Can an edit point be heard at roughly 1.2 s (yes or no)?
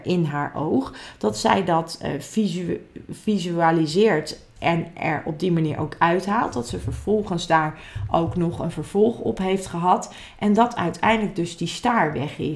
no